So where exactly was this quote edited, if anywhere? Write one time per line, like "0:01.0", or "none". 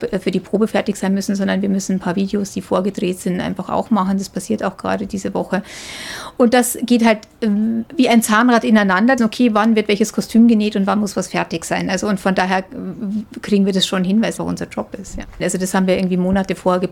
0:09.2
0:14.4
0:15.4